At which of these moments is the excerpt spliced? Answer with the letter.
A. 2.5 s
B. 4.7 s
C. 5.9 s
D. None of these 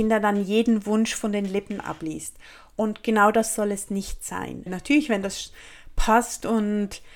B